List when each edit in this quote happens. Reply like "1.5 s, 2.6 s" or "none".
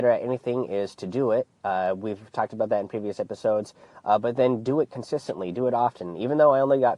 none